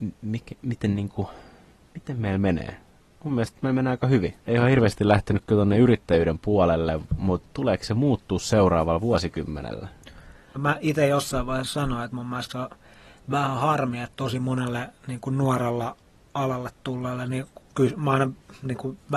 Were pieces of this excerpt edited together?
yes; 2 cuts; at 4.4 s, 10.6 s

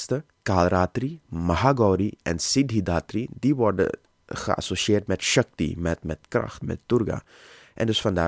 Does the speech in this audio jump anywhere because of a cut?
yes; 1 cut; at 6.6 s

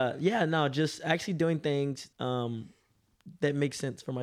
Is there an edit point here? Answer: yes; 1 cut; at 2.1 s

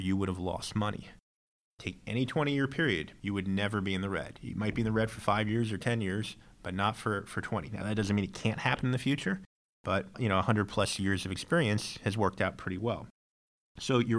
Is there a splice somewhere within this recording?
no; 0 cuts

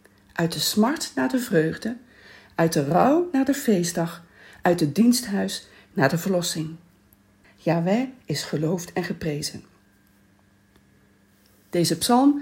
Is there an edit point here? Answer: yes; 1 cut; at 7.4 s

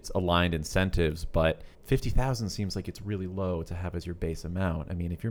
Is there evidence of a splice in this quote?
yes; 1 cut; at 1.7 s

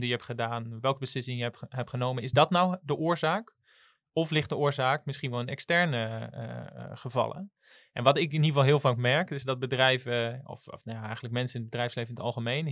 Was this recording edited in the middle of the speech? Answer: no; 0 cuts

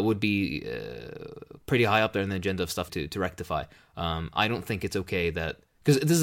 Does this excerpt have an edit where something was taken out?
yes; 1 cut; at 2.9 s

